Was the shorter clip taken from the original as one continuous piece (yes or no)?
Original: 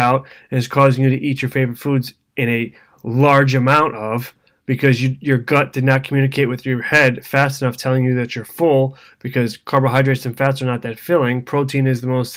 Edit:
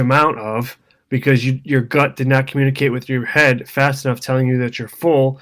yes